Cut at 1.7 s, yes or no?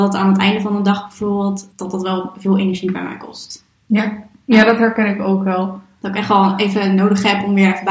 yes